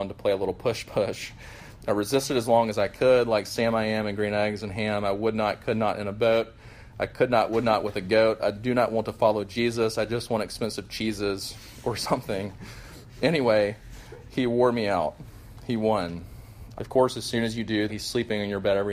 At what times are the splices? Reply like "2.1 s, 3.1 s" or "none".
16.8 s, 17.9 s